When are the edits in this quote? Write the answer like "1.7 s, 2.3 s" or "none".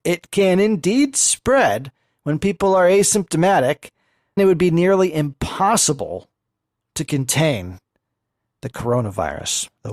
4.4 s